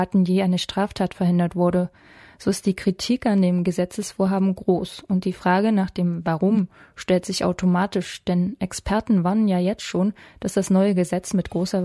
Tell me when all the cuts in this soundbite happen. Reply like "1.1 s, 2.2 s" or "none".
none